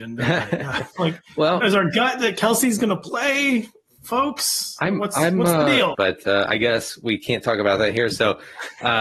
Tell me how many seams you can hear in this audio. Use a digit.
2